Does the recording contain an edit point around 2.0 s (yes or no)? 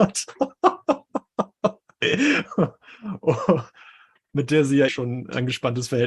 no